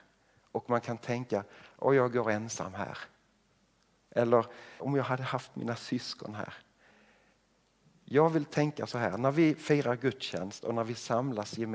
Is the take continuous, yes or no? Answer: no